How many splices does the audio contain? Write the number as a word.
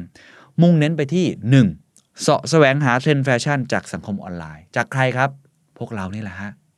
one